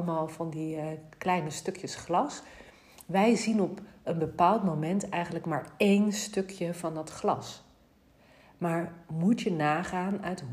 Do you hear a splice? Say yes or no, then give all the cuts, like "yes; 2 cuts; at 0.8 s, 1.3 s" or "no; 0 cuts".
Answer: no; 0 cuts